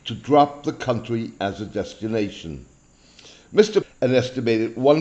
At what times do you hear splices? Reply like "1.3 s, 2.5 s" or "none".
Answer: 3.8 s